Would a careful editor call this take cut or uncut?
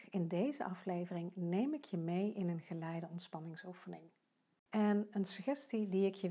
uncut